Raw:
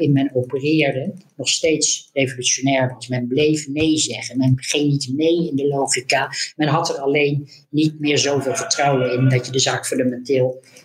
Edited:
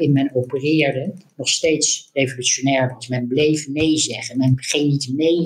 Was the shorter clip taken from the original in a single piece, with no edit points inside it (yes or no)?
yes